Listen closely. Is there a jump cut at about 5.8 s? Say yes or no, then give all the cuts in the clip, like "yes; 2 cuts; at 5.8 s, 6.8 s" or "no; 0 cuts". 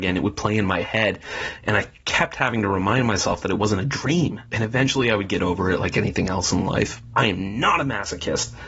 no; 1 cut; at 7.1 s